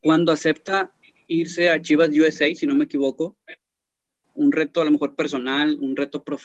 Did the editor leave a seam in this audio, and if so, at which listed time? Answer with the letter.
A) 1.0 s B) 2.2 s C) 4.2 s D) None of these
C